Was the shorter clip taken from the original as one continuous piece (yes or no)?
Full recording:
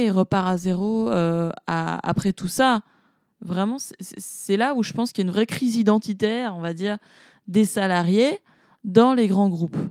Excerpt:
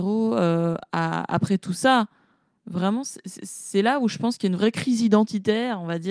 yes